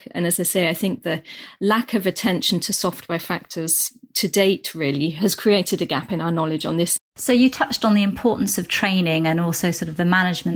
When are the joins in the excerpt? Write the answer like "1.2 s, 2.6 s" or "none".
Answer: 7.0 s